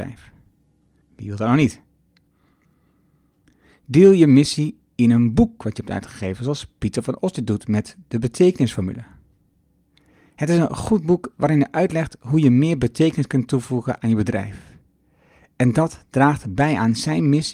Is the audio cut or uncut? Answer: cut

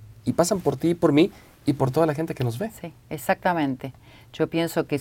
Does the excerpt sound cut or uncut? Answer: uncut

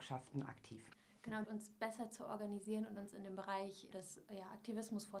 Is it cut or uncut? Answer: cut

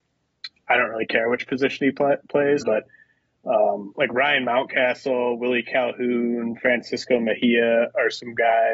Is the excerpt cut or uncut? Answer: cut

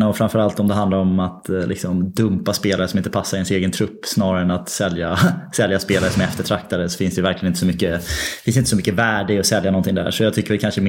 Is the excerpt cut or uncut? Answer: uncut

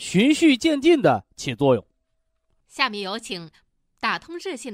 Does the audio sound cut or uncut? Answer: cut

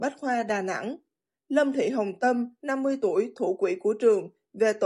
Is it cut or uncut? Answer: uncut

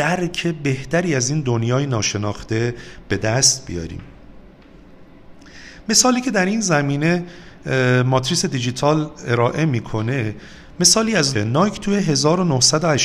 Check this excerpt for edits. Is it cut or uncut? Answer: cut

